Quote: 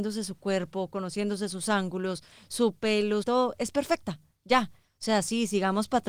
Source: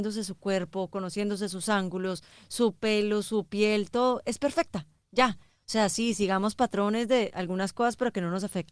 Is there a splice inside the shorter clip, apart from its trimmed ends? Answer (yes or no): yes